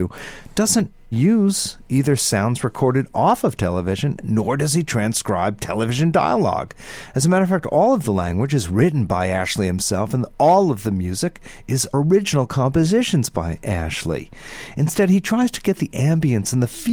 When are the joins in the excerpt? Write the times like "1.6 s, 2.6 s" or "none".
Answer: none